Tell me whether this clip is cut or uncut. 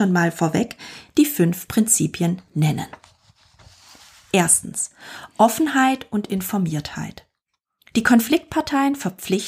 uncut